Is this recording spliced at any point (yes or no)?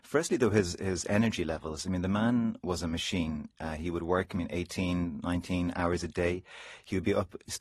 no